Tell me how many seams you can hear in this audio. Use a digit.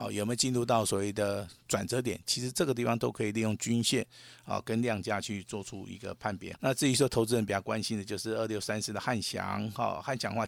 1